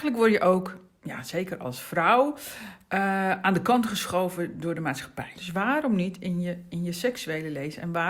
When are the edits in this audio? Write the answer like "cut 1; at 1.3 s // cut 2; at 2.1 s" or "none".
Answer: cut 1; at 5.4 s